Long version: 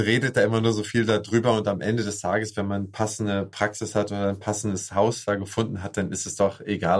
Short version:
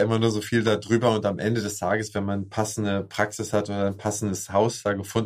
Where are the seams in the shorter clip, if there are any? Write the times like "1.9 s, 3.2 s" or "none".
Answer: none